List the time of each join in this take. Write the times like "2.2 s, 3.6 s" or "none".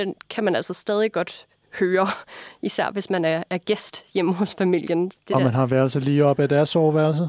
none